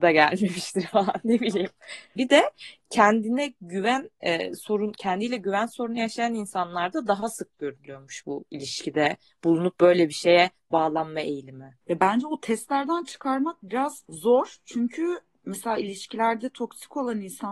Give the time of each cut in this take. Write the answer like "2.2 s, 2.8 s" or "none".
2.2 s